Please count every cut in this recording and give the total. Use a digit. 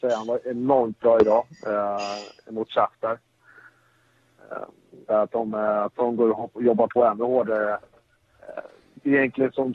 2